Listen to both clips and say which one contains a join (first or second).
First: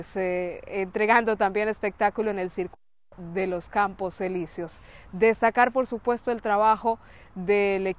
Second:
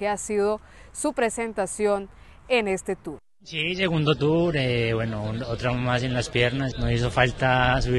second